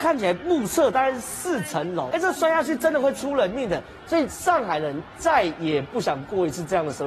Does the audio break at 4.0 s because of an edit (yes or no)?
yes